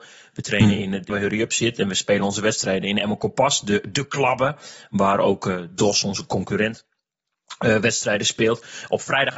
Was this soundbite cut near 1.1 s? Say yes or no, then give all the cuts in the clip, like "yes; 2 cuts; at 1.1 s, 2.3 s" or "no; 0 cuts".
yes; 1 cut; at 1.1 s